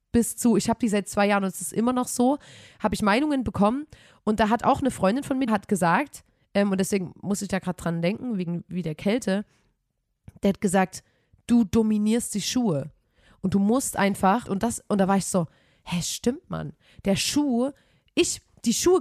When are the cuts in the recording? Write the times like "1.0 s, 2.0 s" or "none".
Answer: 5.5 s, 14.5 s